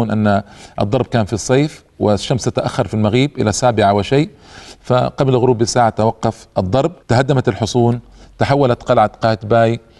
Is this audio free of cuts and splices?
no; 1 cut; at 7.0 s

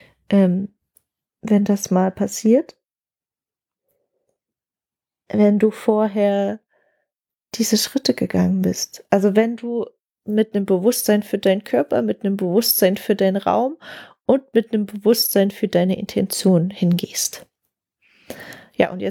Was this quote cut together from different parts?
no; 0 cuts

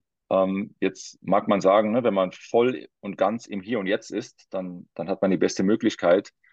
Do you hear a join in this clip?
no; 0 cuts

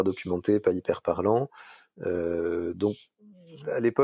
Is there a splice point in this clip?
no; 0 cuts

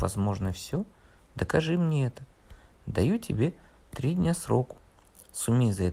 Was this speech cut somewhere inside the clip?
no; 0 cuts

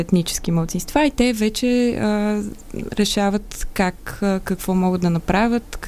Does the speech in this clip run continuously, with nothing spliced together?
yes; 0 cuts

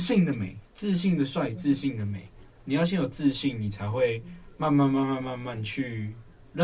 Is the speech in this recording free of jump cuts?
yes; 0 cuts

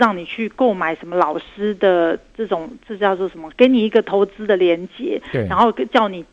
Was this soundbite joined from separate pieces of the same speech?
no; 0 cuts

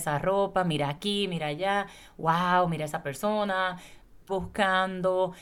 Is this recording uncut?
no; 1 cut; at 4.3 s

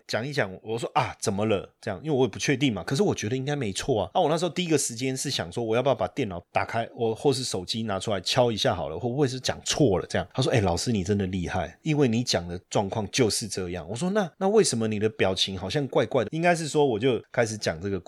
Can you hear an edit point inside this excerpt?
yes; 1 cut; at 16.3 s

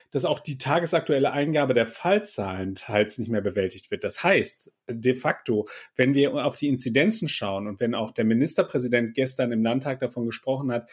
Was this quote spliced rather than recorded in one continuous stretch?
no; 0 cuts

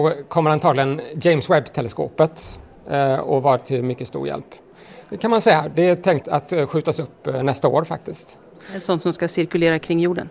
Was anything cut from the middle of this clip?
yes; 2 cuts; at 5.0 s, 6.2 s

